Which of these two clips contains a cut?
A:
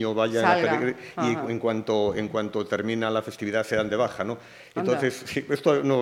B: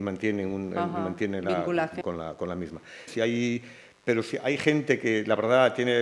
B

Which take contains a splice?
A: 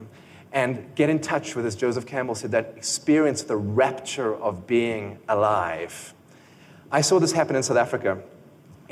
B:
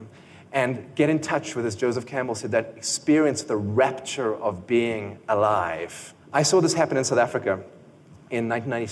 B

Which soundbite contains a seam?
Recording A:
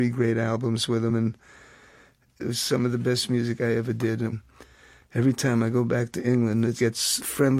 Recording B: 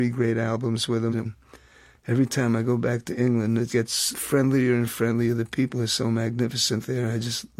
B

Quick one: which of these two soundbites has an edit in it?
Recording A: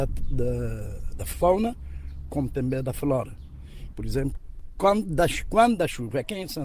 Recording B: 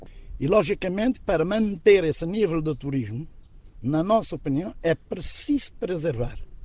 A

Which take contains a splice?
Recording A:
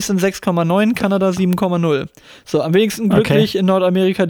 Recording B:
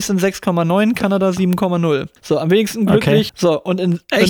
B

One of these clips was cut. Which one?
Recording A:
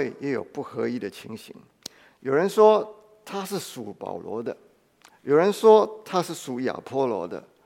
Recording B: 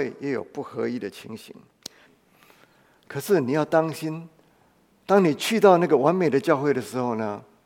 B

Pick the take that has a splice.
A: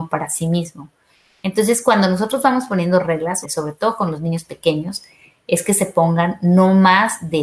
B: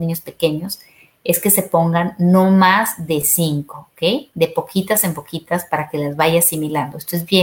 A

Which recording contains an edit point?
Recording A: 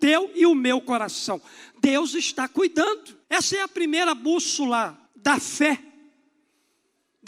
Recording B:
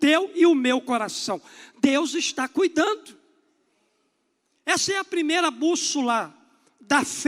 A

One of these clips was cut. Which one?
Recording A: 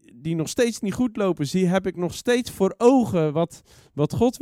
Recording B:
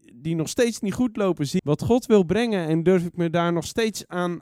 B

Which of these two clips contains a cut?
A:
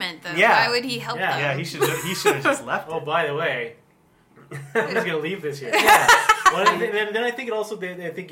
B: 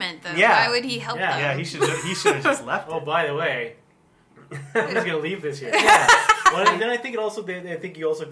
B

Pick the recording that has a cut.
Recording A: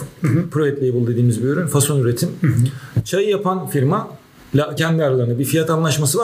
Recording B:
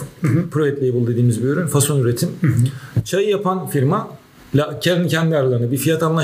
A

